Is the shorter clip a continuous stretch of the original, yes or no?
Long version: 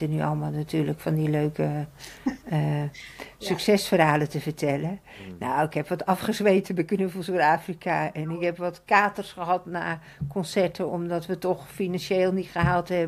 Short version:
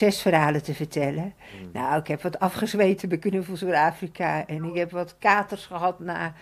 yes